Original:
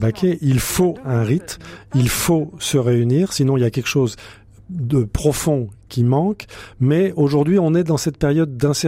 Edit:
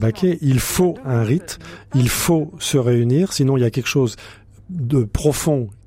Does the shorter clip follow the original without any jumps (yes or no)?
yes